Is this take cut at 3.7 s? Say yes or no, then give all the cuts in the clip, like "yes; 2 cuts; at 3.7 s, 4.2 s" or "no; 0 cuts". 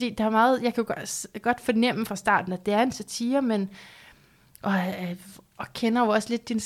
no; 0 cuts